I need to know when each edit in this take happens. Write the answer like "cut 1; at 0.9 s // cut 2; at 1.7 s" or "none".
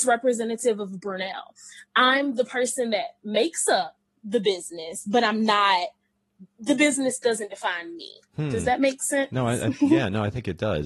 none